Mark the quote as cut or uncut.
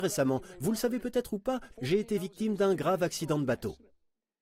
cut